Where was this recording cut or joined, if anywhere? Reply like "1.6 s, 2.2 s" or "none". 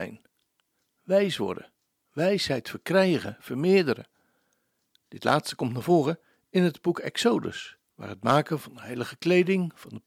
5.0 s